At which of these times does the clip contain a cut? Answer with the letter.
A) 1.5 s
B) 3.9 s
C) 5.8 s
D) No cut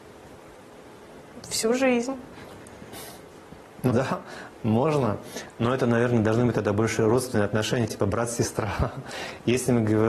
B